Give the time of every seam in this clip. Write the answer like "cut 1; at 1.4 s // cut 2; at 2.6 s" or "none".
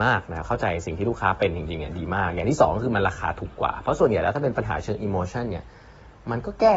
none